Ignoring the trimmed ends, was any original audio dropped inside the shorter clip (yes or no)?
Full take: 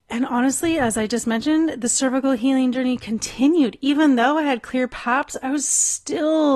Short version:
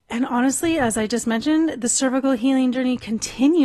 no